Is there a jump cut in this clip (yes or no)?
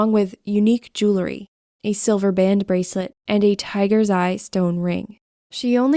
yes